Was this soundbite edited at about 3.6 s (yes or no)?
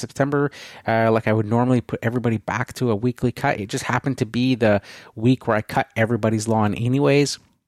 no